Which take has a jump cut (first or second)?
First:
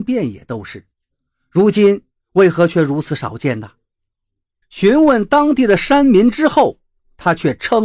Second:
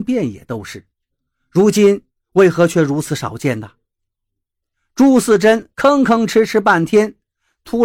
first